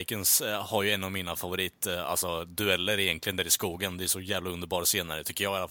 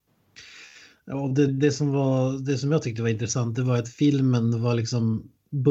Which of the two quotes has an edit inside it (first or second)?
second